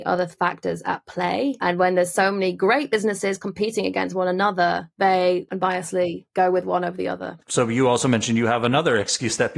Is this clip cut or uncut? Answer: uncut